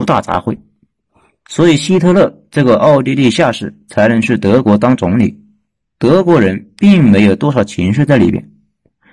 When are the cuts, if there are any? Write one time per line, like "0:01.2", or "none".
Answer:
none